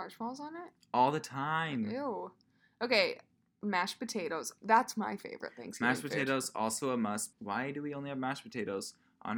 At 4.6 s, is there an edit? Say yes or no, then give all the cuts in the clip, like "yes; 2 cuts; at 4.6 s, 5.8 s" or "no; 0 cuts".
no; 1 cut; at 7.3 s